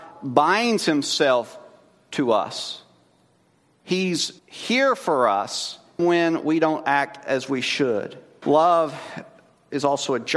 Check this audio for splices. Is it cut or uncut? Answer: cut